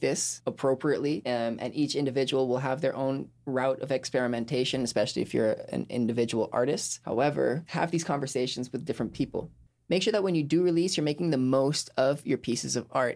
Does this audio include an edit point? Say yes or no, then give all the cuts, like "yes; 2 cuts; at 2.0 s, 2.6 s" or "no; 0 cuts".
no; 0 cuts